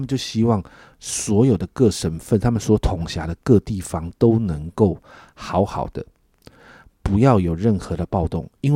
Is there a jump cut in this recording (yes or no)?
no